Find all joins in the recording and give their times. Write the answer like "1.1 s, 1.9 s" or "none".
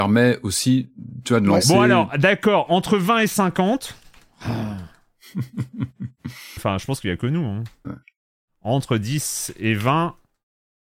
6.6 s, 7.8 s